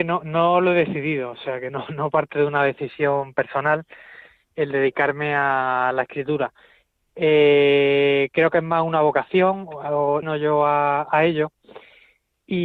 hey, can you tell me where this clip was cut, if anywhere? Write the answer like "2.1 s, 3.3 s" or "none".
10.2 s